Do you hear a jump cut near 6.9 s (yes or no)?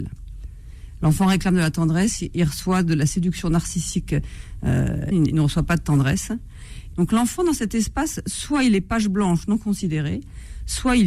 yes